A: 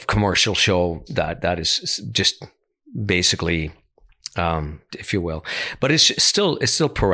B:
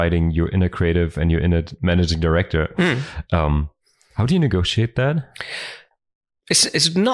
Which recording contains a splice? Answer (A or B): A